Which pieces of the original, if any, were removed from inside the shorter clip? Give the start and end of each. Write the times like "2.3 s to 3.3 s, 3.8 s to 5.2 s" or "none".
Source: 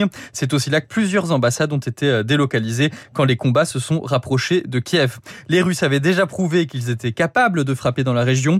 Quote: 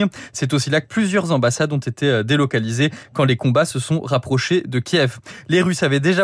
none